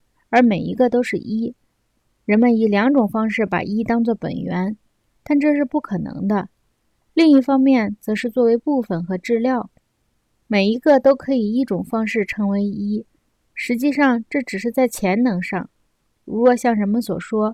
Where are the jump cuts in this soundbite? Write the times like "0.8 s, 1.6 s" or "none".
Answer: 7.0 s